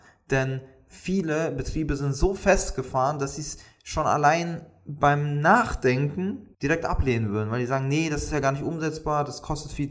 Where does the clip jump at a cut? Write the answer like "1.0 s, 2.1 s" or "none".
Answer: 6.5 s